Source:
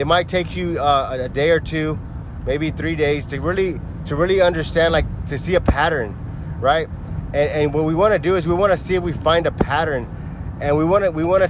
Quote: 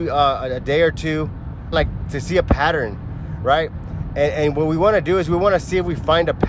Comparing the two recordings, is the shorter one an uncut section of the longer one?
no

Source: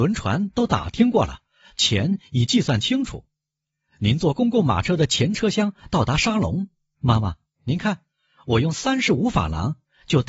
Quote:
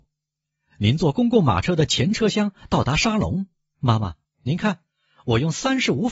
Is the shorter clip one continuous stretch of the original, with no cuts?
yes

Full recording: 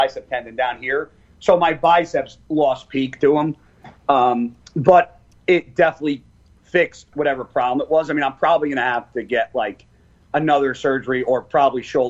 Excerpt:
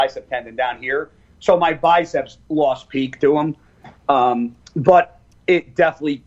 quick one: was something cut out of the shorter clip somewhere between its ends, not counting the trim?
no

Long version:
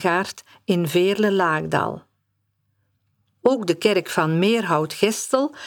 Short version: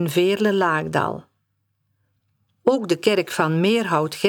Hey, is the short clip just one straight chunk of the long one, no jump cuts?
yes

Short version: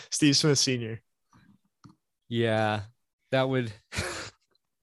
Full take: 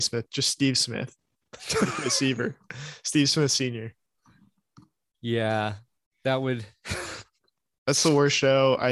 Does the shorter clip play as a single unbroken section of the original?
yes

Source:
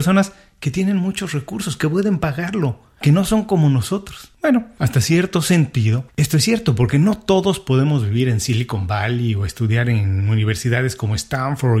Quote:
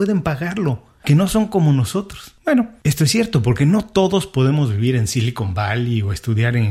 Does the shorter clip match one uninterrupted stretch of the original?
no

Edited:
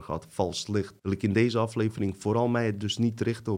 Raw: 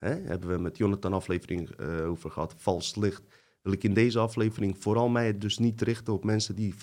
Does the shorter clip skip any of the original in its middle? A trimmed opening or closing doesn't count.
yes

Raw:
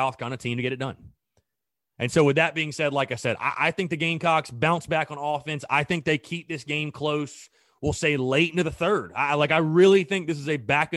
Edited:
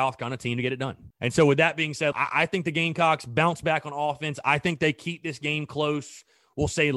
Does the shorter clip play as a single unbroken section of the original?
no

